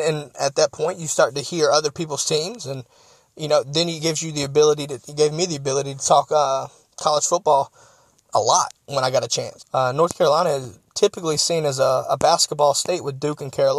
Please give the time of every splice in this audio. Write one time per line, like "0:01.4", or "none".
0:09.6